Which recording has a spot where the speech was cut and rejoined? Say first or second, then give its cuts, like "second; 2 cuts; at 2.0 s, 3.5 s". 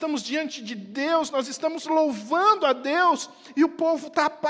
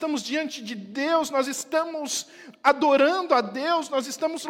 first; 1 cut; at 1.3 s